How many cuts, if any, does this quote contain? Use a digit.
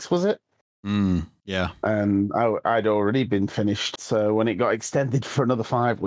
1